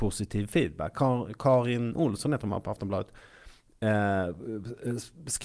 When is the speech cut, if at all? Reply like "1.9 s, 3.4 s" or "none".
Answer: 0.9 s